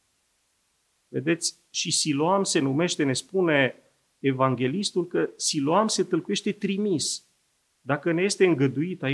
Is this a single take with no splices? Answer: no; 2 cuts; at 1.0 s, 7.8 s

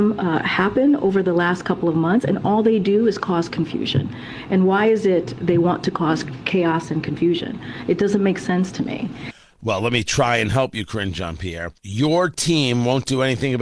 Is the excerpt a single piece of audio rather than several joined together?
no; 1 cut; at 11.8 s

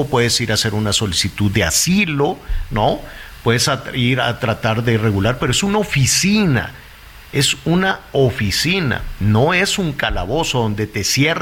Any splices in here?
no; 0 cuts

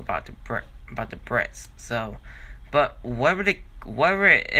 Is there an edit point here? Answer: no; 0 cuts

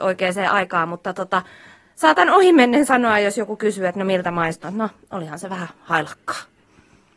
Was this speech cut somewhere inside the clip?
yes; 1 cut; at 4.6 s

